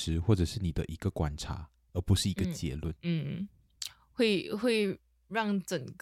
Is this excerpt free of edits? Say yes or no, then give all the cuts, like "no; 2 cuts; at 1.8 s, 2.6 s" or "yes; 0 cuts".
no; 1 cut; at 2.9 s